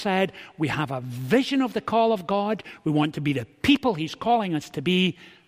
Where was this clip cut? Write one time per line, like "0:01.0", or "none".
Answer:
none